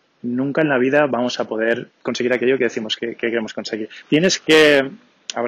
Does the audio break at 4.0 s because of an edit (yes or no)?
yes